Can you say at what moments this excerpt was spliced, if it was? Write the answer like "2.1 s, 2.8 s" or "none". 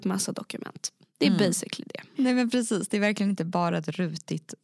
2.1 s